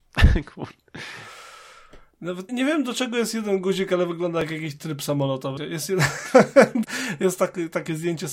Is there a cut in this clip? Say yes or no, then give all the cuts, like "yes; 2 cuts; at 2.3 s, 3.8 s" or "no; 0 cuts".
yes; 3 cuts; at 2.5 s, 5.6 s, 6.8 s